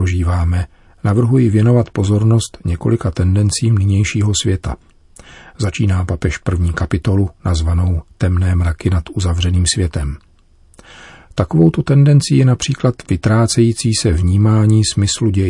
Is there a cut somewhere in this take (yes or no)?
no